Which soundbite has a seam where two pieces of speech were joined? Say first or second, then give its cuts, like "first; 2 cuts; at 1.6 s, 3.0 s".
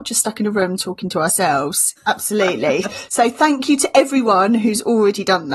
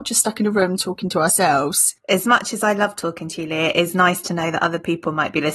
first; 1 cut; at 2.0 s